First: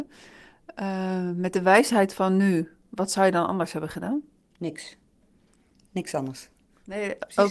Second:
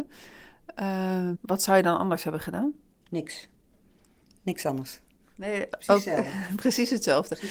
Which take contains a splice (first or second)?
second